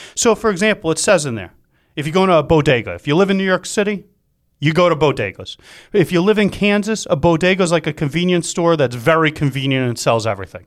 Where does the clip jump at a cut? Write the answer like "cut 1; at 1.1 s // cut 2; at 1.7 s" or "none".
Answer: none